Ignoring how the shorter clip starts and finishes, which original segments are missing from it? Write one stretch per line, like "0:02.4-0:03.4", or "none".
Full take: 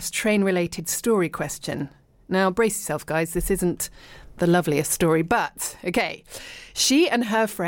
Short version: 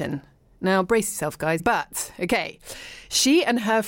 0:03.3-0:05.2